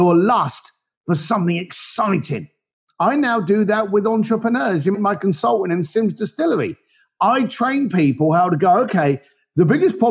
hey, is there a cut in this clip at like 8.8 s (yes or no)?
no